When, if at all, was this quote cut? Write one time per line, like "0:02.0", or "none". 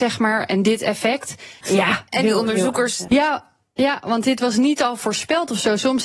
0:01.6
0:03.1